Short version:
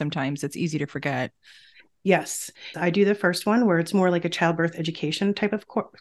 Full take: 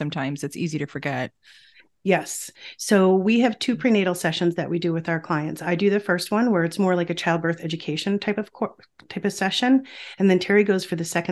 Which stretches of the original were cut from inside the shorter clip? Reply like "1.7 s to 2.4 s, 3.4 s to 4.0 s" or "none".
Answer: 2.7 s to 5.6 s